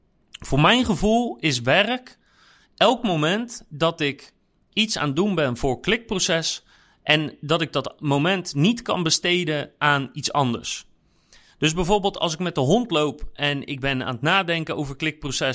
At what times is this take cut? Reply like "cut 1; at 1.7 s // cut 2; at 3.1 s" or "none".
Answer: none